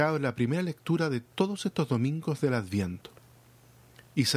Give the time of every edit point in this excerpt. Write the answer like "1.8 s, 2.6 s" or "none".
none